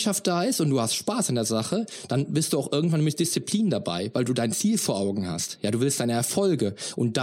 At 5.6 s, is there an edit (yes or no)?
no